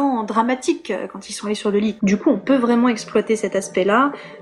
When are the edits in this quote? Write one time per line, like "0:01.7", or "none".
0:02.0